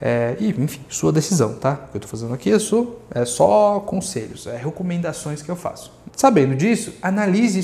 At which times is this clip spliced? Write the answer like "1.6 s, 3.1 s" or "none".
6.1 s